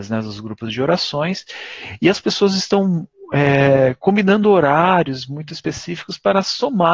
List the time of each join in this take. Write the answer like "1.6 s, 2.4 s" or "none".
none